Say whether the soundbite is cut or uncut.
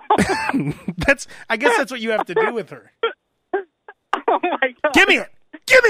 uncut